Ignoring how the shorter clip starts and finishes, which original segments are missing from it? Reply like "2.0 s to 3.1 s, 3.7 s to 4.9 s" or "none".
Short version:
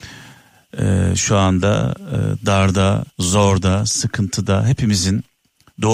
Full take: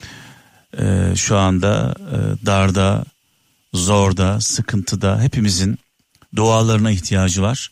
3.1 s to 3.6 s